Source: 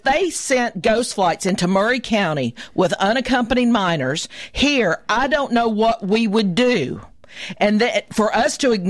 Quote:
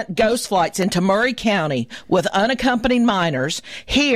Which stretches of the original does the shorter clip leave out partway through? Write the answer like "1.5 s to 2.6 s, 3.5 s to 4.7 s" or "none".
none